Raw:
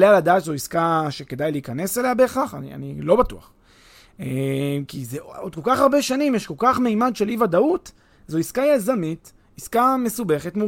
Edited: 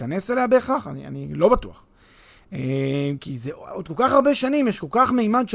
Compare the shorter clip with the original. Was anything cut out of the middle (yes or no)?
no